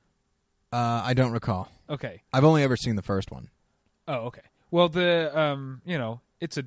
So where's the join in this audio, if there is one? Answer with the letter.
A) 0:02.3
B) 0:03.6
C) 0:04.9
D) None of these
A